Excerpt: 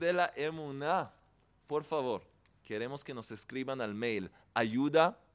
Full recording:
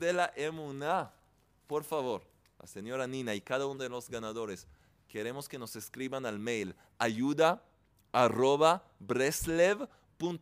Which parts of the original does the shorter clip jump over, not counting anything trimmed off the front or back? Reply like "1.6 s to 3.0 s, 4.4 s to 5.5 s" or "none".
2.5 s to 4.9 s